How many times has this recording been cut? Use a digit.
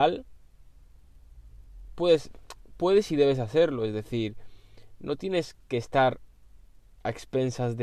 0